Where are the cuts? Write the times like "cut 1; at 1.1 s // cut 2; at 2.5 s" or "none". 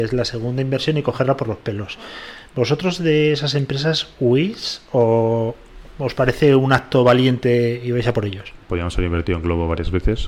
cut 1; at 8.6 s

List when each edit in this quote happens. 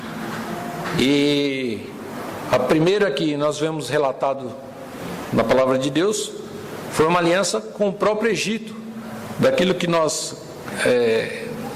none

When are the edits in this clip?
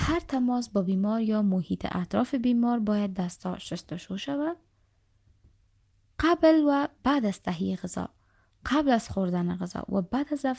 none

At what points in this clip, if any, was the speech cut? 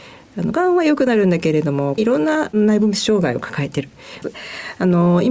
cut 1; at 2.0 s // cut 2; at 4.2 s

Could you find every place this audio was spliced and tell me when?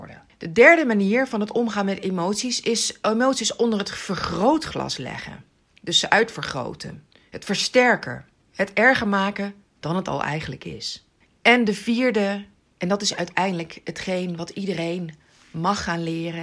none

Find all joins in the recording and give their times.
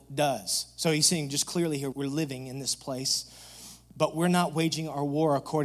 cut 1; at 1.9 s // cut 2; at 3.9 s

